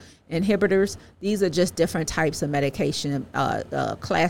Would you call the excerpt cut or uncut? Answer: uncut